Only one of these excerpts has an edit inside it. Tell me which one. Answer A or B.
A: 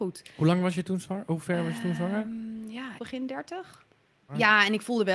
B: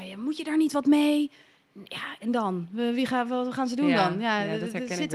A